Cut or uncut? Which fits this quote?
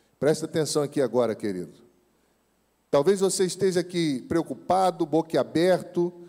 uncut